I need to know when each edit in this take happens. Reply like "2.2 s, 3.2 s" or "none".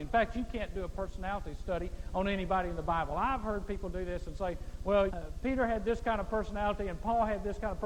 5.1 s